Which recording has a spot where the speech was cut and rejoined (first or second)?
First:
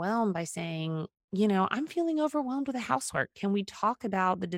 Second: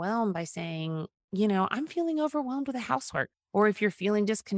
second